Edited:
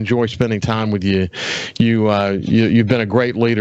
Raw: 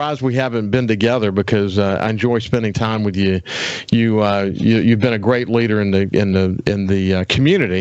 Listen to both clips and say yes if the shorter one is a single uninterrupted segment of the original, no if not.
yes